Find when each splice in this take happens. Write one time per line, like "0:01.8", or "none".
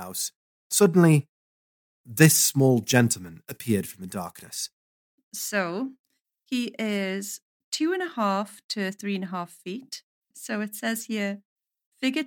0:05.1
0:10.3